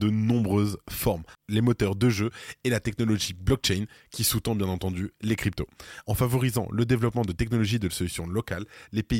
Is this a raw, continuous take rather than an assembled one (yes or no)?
no